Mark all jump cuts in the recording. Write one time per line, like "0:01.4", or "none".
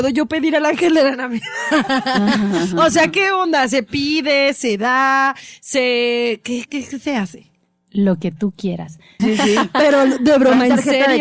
0:06.7
0:09.2